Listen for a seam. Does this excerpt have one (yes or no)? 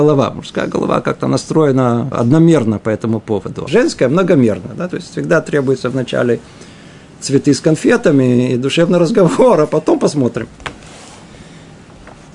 yes